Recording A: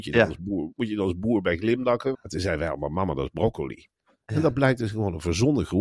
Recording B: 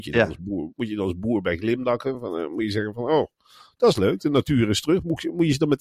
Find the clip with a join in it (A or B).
A